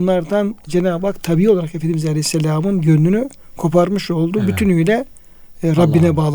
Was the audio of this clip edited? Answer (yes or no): no